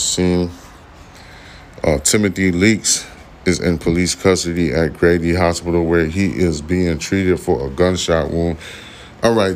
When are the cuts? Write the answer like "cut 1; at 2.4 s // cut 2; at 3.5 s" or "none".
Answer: none